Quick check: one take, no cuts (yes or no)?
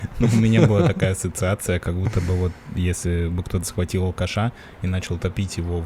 yes